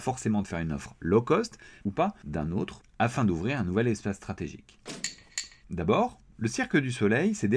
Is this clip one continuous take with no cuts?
no; 2 cuts; at 1.8 s, 5.6 s

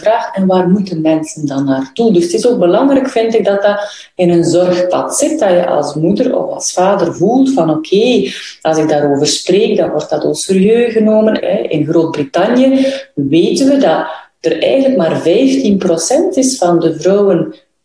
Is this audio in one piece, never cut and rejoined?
no; 1 cut; at 11.4 s

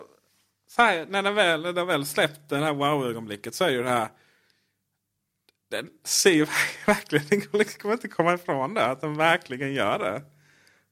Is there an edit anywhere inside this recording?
no; 0 cuts

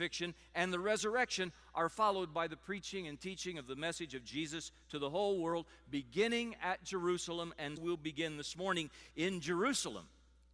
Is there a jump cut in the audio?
yes; 1 cut; at 7.8 s

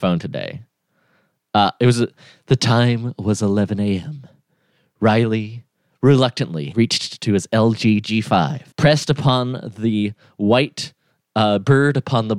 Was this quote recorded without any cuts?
no; 2 cuts; at 6.7 s, 8.7 s

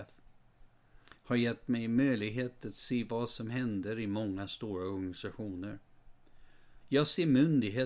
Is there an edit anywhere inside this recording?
yes; 1 cut; at 6.8 s

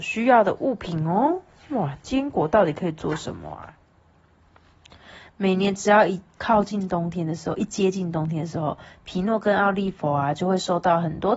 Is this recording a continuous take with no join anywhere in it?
yes; 0 cuts

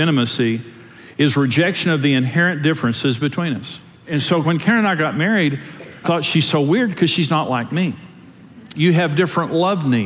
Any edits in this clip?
yes; 2 cuts; at 6.0 s, 8.7 s

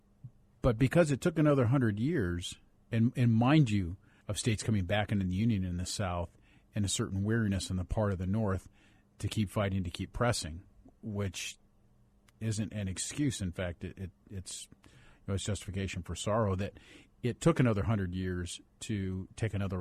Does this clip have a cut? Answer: yes; 1 cut; at 4.2 s

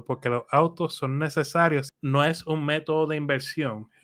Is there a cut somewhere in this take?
yes; 1 cut; at 1.9 s

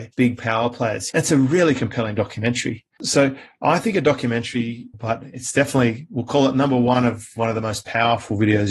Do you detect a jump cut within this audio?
yes; 3 cuts; at 1.1 s, 3.0 s, 4.9 s

